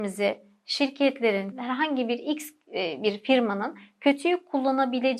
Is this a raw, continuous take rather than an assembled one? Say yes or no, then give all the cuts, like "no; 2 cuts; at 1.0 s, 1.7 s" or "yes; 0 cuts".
no; 1 cut; at 1.5 s